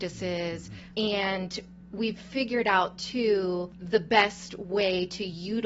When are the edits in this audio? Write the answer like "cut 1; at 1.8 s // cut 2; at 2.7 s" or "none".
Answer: cut 1; at 0.9 s